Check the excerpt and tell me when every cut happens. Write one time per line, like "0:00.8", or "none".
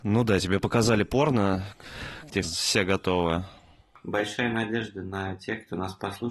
0:02.4